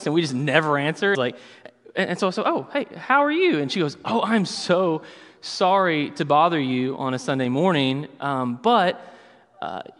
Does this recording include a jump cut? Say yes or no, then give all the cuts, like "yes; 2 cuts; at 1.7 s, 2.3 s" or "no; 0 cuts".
yes; 1 cut; at 1.1 s